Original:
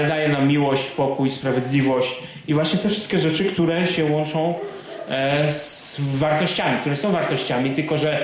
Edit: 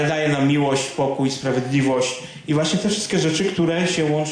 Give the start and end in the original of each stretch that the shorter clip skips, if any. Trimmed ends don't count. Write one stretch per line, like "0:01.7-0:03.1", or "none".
none